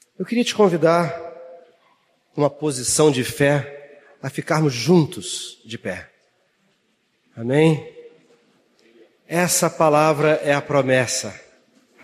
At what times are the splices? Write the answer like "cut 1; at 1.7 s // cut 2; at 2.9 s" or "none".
none